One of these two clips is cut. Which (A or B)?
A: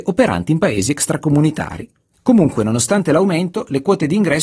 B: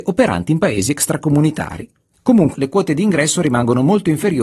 B